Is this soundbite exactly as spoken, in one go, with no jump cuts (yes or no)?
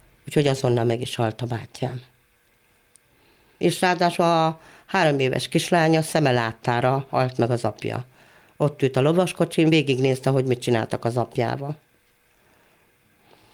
yes